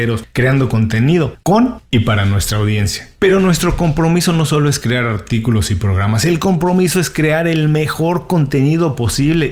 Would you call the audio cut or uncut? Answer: uncut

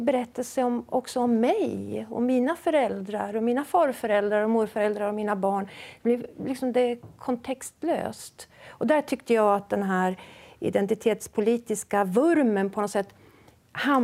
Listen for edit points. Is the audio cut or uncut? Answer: uncut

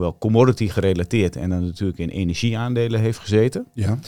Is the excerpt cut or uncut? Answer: uncut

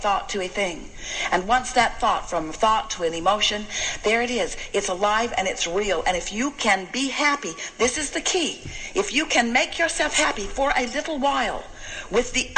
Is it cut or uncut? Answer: cut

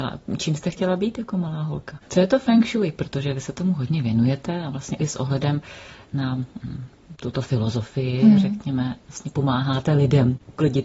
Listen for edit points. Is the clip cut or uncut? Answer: cut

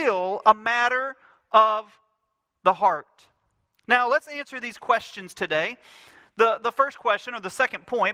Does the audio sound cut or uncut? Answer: uncut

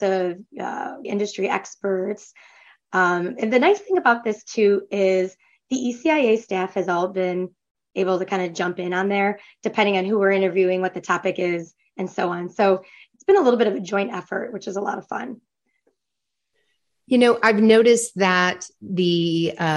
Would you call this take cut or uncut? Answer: cut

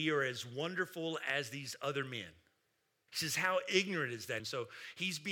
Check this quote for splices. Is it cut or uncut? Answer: cut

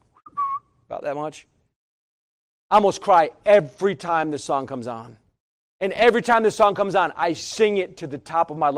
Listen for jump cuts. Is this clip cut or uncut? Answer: uncut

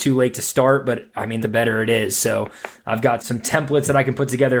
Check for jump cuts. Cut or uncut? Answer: cut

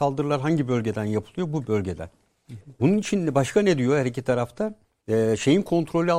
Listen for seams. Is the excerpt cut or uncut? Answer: cut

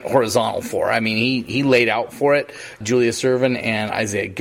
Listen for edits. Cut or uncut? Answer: cut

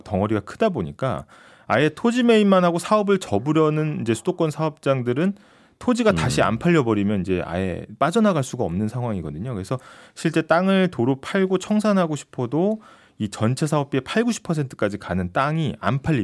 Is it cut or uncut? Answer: uncut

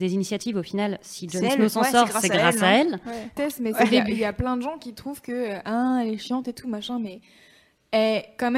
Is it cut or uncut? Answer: cut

